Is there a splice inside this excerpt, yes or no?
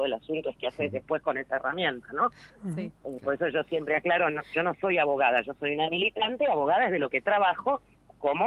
no